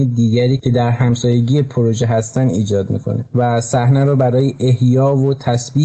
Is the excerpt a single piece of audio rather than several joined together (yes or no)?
yes